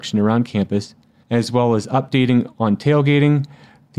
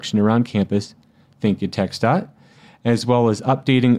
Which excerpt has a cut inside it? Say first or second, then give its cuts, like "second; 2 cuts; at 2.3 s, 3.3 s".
first; 1 cut; at 1.2 s